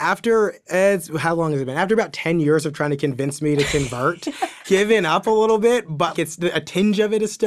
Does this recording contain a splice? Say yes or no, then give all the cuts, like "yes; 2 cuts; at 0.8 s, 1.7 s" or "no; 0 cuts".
yes; 2 cuts; at 4.6 s, 6.1 s